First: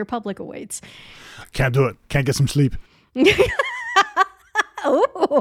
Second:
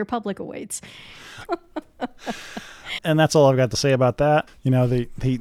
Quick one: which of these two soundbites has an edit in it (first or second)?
second